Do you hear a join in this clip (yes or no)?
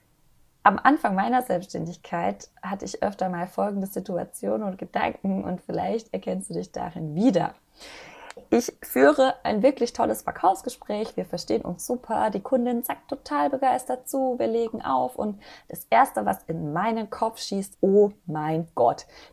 yes